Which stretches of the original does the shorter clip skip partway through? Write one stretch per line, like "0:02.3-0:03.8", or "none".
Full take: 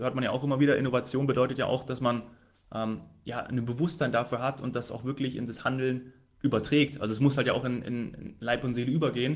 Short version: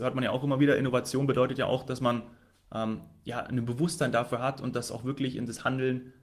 none